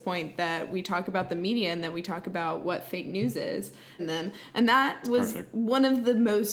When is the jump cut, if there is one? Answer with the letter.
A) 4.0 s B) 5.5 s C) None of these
A